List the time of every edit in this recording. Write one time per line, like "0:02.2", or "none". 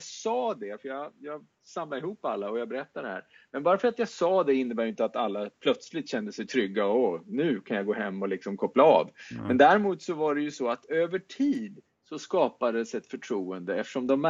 none